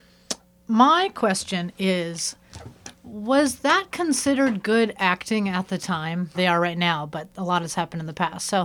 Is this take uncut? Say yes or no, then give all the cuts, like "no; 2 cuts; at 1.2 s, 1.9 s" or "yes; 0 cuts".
no; 1 cut; at 6.3 s